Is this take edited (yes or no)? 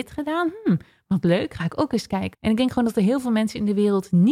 yes